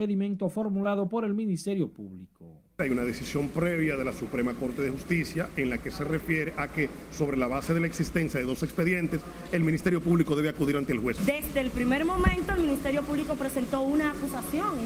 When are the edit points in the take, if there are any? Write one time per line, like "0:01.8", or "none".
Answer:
0:11.2